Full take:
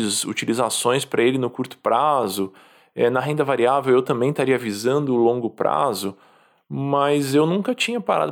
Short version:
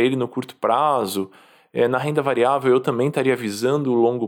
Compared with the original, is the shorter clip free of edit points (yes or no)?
yes